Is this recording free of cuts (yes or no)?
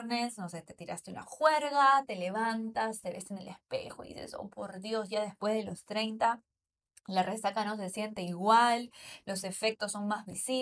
yes